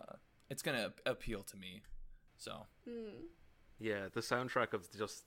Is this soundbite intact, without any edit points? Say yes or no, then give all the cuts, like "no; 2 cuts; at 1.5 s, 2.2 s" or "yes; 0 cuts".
yes; 0 cuts